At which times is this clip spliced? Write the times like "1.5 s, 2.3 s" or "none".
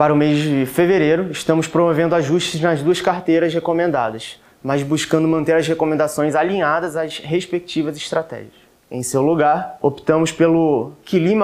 8.8 s